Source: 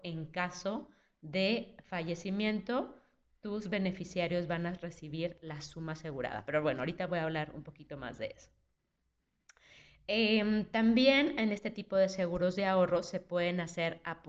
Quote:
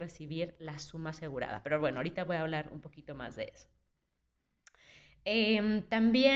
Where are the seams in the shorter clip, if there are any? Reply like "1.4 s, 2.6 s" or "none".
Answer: none